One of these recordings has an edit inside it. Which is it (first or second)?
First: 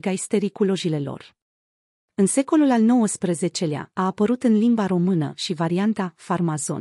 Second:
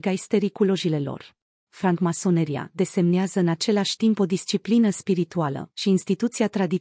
second